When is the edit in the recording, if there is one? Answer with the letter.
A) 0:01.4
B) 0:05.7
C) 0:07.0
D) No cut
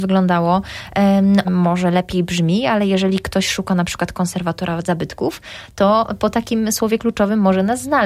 A